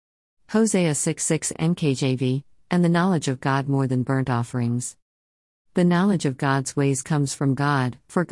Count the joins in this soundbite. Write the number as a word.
one